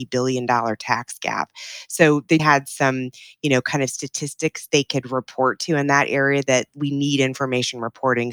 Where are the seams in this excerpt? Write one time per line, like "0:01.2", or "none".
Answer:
0:02.4